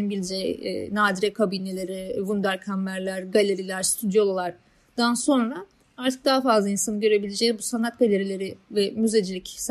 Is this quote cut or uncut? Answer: uncut